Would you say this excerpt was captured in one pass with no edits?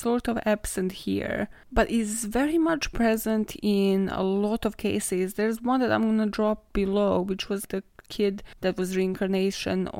yes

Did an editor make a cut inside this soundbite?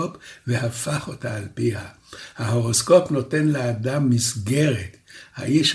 no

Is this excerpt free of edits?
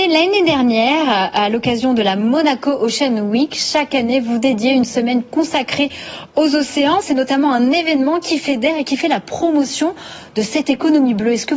no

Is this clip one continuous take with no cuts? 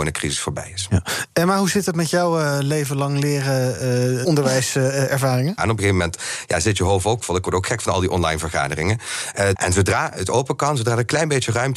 no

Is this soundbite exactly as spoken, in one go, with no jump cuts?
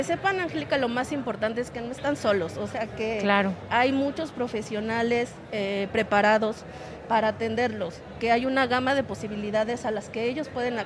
yes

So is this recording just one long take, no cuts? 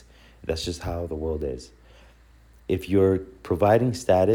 yes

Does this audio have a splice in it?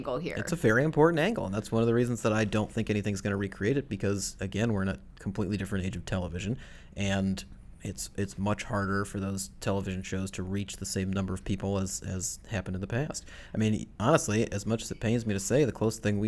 no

